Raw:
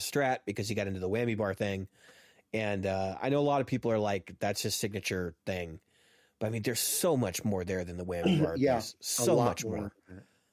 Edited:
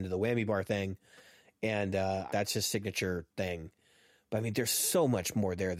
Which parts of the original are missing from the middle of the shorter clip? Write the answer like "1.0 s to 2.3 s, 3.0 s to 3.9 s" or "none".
3.2 s to 4.4 s